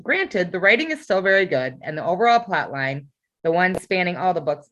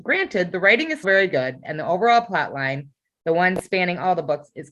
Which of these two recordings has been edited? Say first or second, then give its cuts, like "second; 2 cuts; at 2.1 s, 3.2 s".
second; 1 cut; at 1.0 s